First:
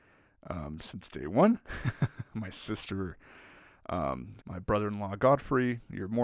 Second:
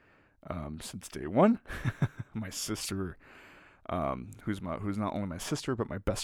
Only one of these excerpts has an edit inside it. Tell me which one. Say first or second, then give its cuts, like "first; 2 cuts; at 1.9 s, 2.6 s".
first; 1 cut; at 4.4 s